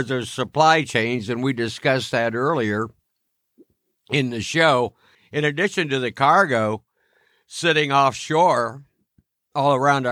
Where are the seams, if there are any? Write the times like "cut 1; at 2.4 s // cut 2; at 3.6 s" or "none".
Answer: cut 1; at 5.1 s